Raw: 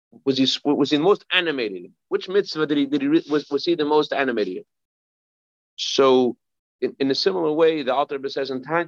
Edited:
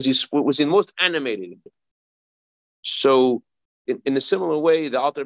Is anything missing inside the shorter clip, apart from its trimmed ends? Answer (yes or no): yes